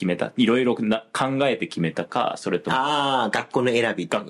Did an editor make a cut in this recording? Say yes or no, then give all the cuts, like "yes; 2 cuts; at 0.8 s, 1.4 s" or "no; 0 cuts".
no; 0 cuts